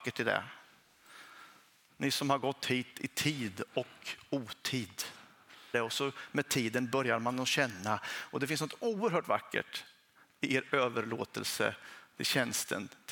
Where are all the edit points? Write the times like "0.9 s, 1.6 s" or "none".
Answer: 1.9 s, 5.7 s